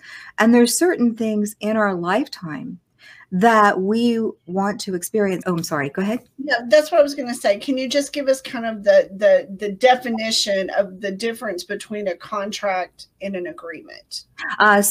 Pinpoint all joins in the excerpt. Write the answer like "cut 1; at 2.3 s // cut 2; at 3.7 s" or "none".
cut 1; at 5.4 s